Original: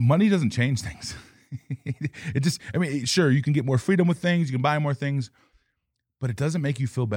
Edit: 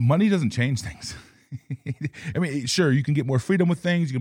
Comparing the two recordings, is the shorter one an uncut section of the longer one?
no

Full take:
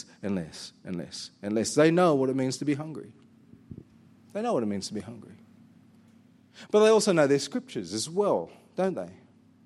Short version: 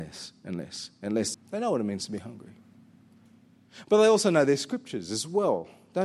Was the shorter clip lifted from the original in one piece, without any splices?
no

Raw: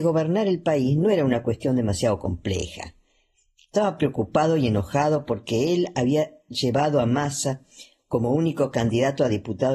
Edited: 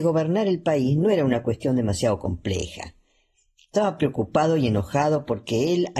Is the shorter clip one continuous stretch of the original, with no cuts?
yes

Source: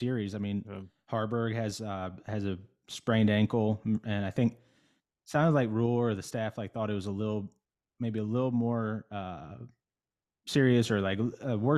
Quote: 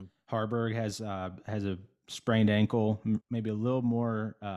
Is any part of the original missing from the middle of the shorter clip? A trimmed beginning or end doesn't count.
yes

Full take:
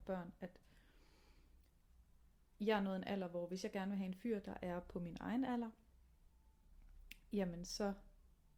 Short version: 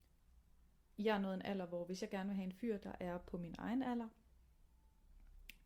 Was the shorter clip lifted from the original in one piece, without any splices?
yes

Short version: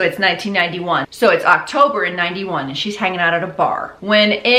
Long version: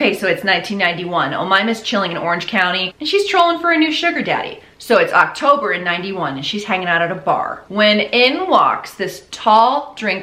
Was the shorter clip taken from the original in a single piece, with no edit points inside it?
no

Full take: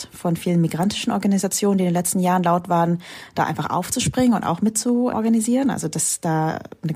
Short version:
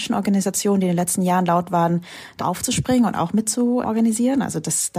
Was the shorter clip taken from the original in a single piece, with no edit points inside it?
no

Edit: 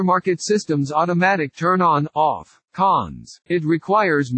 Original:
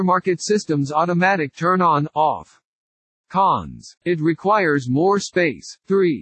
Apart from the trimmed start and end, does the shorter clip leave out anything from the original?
yes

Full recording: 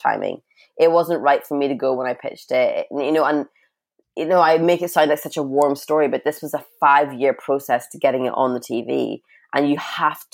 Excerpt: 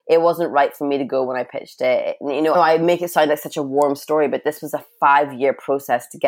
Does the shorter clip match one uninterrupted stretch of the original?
no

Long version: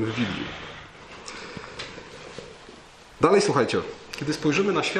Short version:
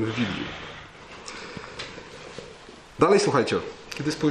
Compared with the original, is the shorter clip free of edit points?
no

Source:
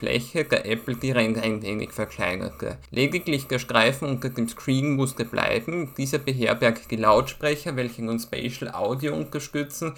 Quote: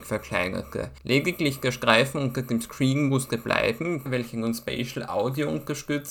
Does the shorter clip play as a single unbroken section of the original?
no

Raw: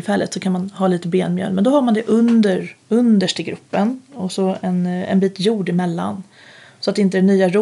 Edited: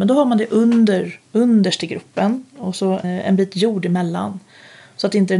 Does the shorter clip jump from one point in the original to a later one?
yes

